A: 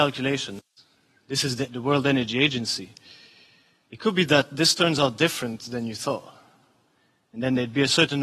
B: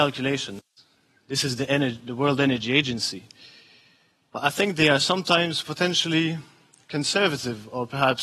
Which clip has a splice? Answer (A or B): A